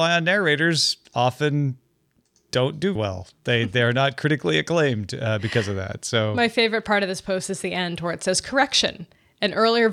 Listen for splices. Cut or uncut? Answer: cut